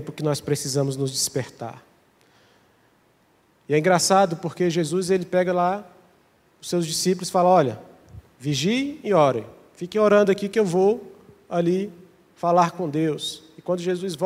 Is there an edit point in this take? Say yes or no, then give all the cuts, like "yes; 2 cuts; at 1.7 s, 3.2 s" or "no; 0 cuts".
no; 0 cuts